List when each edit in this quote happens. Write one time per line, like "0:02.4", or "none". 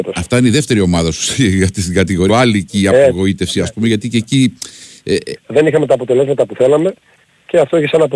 0:02.3
0:05.4